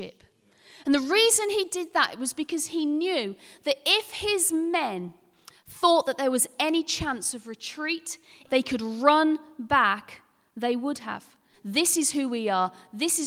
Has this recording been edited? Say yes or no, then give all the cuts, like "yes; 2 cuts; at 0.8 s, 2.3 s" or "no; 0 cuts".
yes; 2 cuts; at 8.5 s, 11.5 s